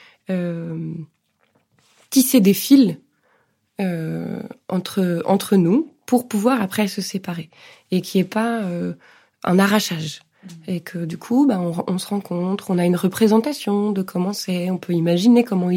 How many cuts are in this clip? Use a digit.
0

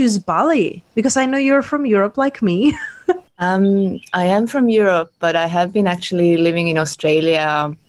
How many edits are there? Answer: 1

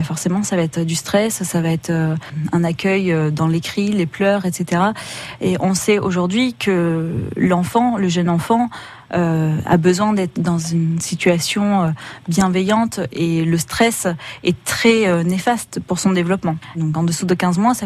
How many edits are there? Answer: 2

